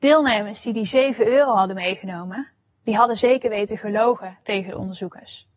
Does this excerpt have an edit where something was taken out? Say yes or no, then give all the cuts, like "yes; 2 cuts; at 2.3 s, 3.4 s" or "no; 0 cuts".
no; 0 cuts